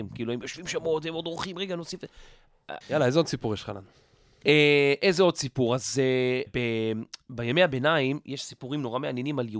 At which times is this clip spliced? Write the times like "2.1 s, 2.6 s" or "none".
2.8 s, 6.5 s